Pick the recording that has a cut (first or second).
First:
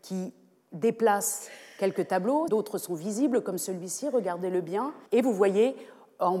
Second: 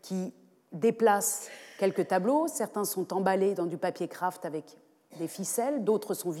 first